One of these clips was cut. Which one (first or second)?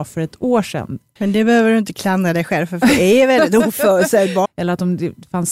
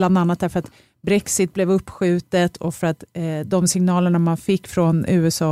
first